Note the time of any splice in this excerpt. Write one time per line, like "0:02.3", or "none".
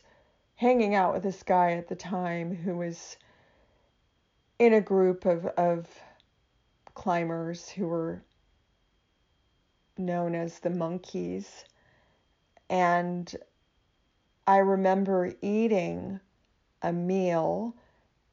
none